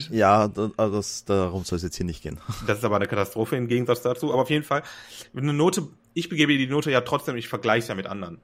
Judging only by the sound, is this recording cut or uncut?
uncut